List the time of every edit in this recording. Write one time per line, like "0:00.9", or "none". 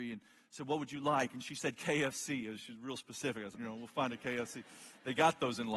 0:03.5

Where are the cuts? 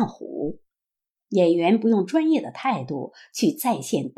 0:01.2

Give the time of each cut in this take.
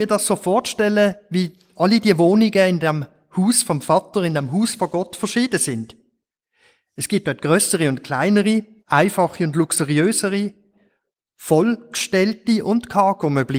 0:08.8

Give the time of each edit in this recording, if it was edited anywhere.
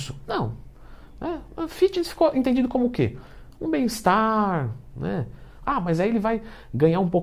0:05.6

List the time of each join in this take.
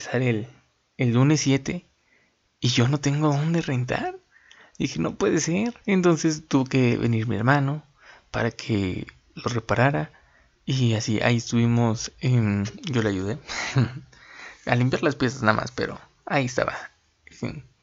0:05.8

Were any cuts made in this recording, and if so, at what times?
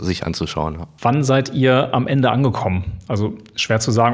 0:01.0

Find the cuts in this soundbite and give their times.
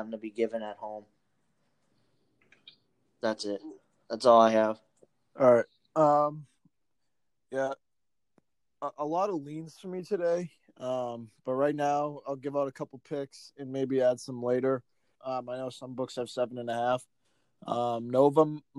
0:15.2

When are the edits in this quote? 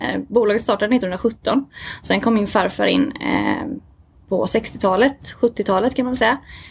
none

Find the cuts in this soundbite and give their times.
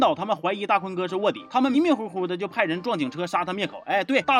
0:01.7

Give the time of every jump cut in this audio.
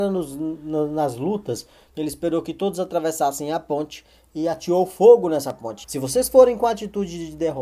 0:01.9
0:05.8

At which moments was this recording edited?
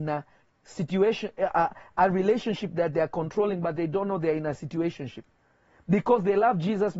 none

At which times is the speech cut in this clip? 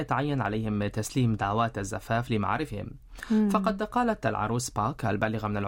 none

